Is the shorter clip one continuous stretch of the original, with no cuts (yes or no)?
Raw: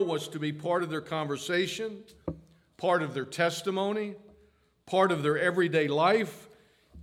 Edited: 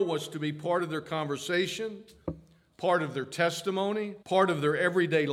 no